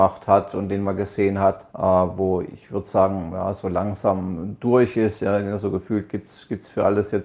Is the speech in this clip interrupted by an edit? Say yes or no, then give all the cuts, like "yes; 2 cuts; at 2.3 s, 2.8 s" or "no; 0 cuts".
yes; 1 cut; at 1.7 s